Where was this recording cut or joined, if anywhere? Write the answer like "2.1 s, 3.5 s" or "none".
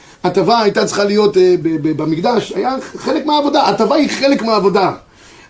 1.6 s